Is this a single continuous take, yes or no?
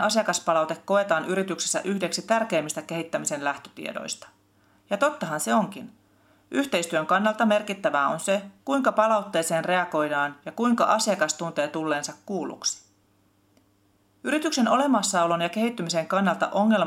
yes